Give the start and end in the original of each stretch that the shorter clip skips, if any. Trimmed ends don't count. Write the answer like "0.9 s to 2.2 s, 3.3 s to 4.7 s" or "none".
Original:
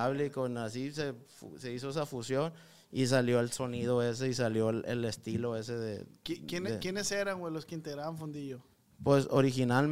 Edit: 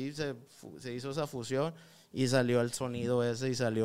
none